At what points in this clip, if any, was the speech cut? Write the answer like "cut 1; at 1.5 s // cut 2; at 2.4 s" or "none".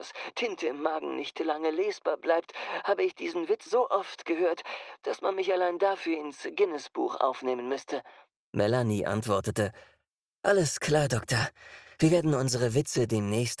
cut 1; at 3.7 s // cut 2; at 8.3 s